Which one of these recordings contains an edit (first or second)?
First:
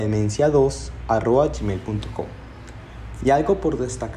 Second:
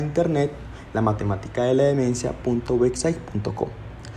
first